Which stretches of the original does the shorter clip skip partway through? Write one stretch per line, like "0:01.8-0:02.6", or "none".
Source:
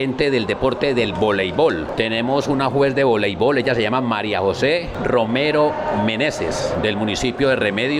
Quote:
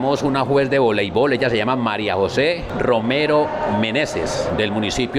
none